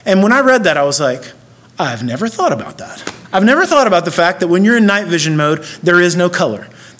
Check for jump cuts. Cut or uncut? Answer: cut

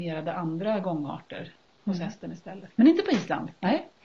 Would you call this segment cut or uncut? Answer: cut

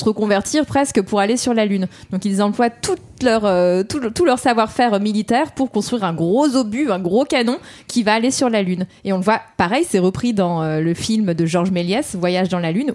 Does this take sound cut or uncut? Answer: uncut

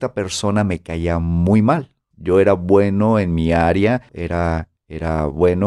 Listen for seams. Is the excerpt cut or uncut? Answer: cut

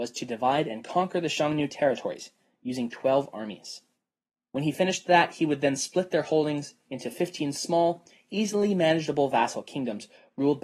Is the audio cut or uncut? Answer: uncut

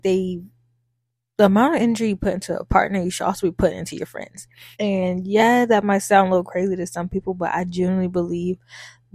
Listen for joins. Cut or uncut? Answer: cut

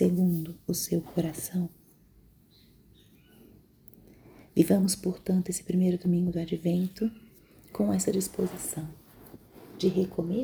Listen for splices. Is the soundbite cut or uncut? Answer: uncut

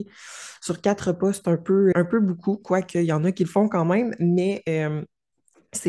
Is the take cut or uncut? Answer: cut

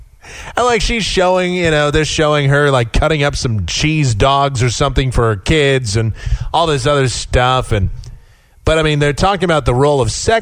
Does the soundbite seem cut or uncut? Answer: uncut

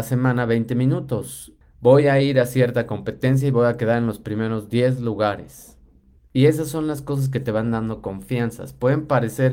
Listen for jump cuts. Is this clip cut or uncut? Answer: cut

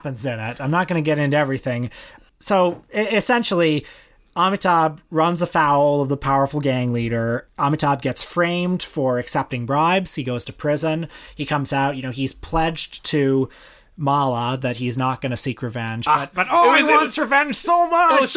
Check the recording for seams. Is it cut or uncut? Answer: uncut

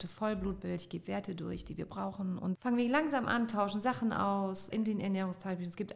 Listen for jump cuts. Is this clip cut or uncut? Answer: cut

